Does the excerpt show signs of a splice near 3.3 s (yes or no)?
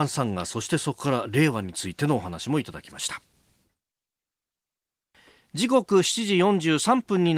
no